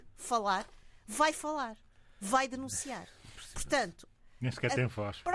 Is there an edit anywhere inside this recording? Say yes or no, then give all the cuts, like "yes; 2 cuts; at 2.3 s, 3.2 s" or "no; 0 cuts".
no; 0 cuts